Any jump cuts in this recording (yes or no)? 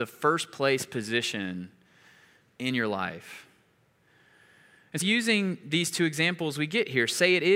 yes